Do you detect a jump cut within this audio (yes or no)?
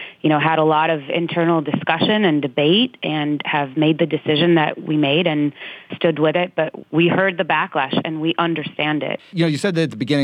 no